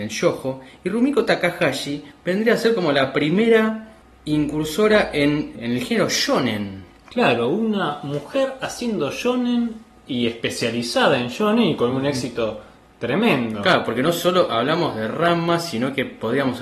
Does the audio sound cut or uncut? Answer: uncut